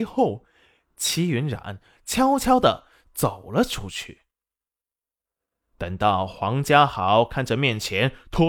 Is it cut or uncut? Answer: uncut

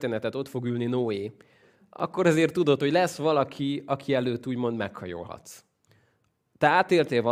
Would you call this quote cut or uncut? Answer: uncut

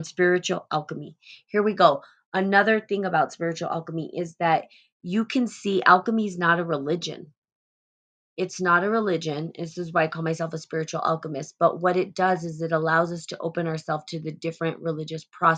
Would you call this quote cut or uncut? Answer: uncut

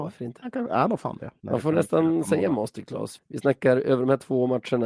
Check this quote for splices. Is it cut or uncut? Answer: cut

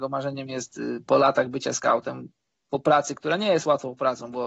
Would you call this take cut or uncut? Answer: cut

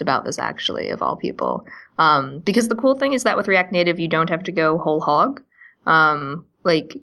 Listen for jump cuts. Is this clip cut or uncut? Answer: uncut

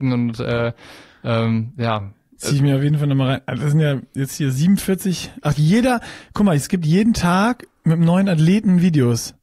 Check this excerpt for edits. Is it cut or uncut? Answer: uncut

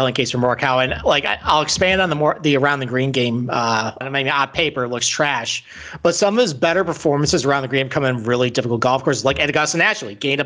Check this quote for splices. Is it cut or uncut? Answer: cut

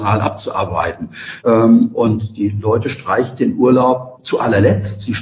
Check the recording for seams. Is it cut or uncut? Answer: cut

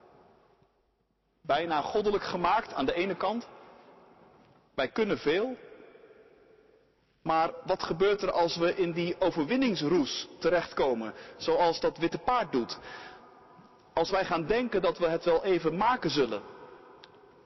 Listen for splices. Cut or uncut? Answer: uncut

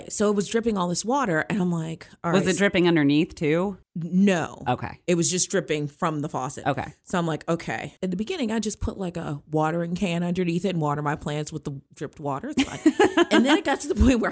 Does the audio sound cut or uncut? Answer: uncut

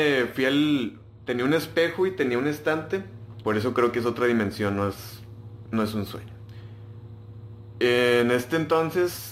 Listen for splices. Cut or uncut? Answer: cut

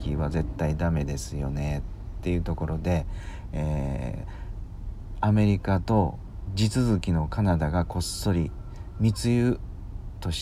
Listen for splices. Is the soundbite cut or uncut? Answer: uncut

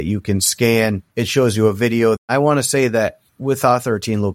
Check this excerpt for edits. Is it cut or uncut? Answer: cut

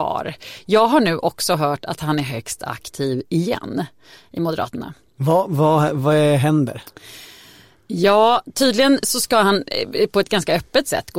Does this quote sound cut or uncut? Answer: uncut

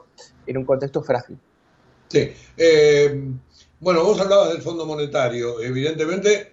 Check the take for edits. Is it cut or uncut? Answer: uncut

